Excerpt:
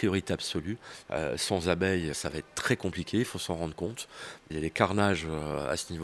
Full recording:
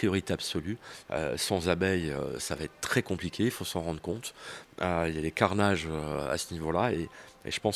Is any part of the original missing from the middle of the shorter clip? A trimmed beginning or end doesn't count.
yes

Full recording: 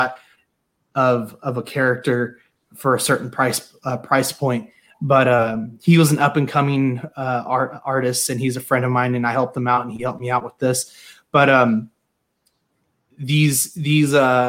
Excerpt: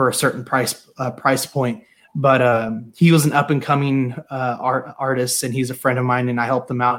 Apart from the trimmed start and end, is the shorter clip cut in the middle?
no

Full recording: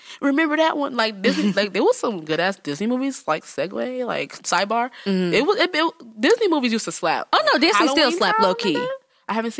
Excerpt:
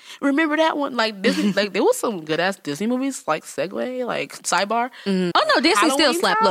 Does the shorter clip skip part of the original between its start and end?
yes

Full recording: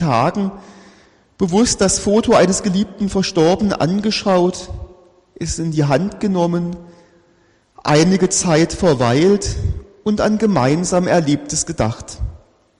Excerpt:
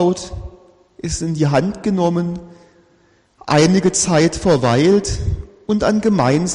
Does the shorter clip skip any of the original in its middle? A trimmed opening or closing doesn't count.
no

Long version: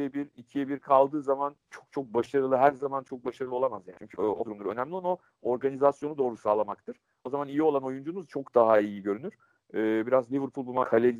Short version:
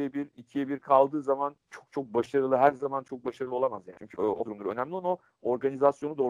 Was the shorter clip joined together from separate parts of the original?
no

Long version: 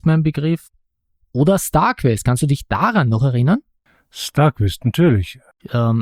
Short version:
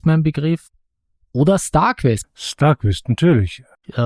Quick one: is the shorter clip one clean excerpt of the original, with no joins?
no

